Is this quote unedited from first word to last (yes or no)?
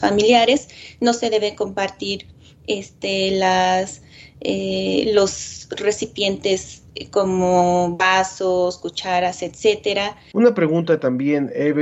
no